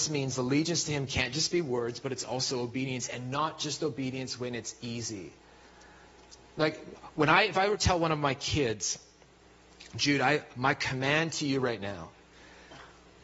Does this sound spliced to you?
no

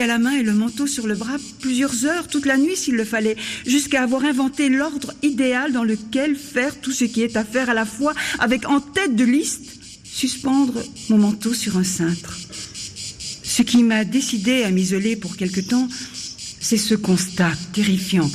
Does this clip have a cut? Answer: no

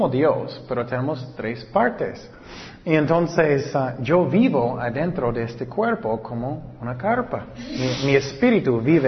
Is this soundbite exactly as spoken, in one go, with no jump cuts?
yes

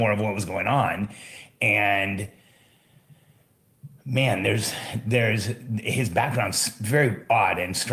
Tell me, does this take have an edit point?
no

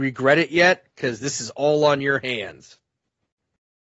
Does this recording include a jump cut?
no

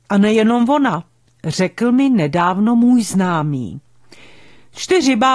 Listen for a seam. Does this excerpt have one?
no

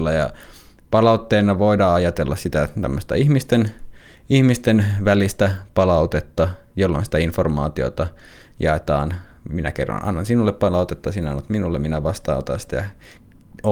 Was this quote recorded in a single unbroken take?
yes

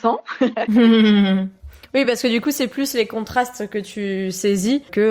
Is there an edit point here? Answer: no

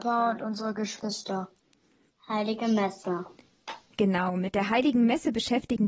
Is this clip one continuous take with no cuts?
no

